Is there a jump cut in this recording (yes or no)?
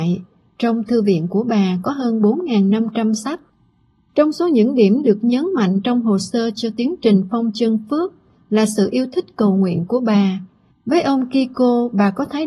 yes